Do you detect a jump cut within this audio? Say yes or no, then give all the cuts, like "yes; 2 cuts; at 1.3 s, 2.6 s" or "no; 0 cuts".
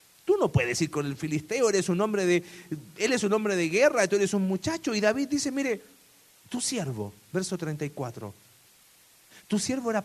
no; 0 cuts